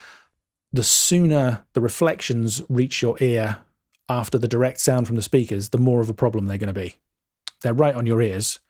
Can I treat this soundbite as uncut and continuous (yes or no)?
no